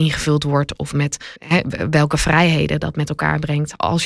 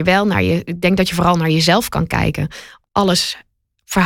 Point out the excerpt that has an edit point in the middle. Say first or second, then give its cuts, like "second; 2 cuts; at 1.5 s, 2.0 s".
first; 1 cut; at 1.4 s